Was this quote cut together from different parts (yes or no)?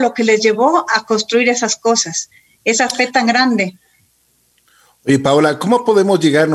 no